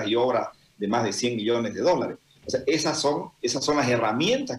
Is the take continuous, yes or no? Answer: no